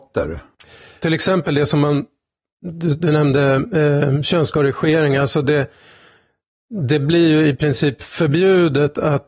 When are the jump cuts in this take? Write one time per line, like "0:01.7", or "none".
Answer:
0:01.0